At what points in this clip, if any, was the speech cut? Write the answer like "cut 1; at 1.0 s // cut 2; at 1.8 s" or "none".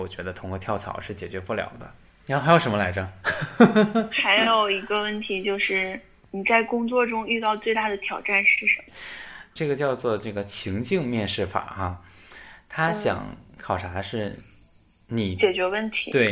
cut 1; at 8.9 s